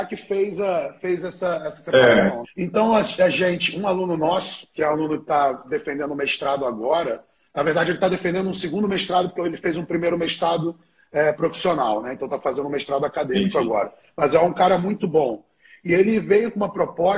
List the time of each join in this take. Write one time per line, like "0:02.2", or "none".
0:02.4